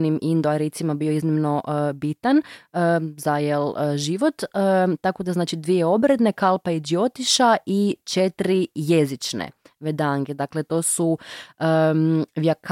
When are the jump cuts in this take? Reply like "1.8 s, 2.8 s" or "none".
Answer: none